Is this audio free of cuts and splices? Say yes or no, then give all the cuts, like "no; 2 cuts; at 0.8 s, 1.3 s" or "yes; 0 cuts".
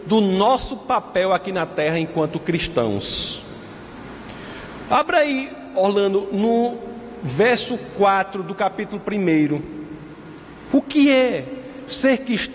no; 2 cuts; at 4.9 s, 10.7 s